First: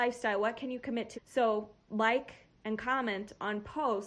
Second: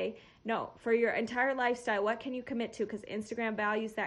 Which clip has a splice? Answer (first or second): first